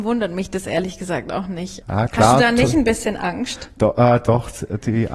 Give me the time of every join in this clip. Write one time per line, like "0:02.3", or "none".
0:01.8